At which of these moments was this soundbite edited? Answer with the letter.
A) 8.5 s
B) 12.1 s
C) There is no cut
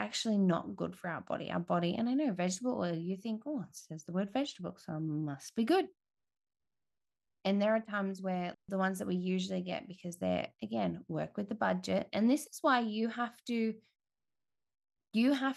A